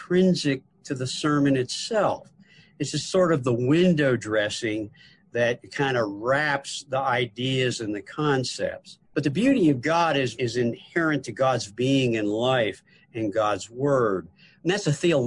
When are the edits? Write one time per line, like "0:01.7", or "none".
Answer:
0:09.0
0:10.3
0:11.7